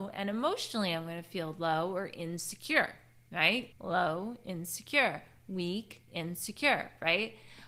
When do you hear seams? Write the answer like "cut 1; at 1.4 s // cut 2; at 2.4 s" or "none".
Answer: cut 1; at 3.7 s